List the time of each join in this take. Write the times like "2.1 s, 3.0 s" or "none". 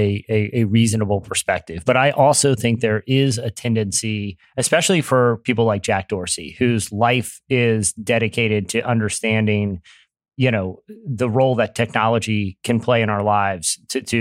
none